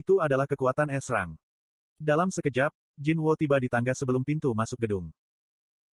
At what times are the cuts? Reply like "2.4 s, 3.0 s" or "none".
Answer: 1.8 s